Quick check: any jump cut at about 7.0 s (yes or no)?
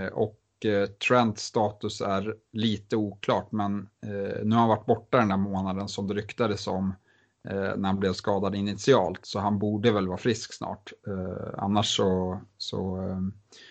no